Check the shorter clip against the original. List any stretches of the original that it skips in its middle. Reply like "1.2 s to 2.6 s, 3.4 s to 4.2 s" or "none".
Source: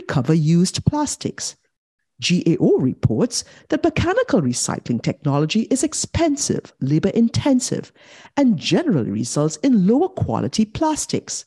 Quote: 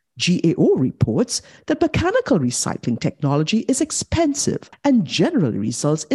6.7 s to 8.3 s